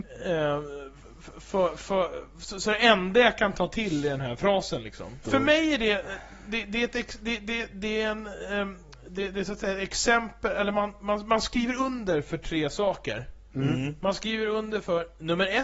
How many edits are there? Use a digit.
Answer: 1